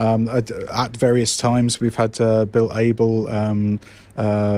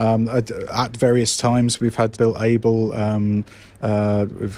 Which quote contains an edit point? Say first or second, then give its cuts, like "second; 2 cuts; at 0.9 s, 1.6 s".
second; 1 cut; at 2.1 s